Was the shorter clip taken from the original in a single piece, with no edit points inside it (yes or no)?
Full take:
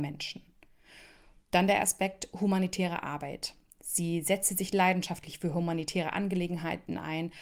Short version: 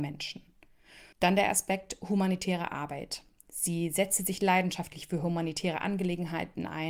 no